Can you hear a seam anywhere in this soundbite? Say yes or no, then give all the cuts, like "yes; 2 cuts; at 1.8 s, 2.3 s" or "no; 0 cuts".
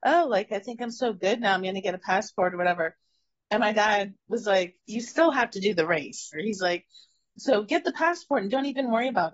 yes; 2 cuts; at 4.8 s, 6.3 s